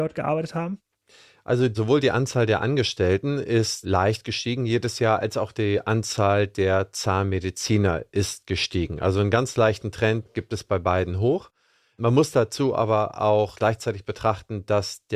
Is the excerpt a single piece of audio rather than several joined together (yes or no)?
yes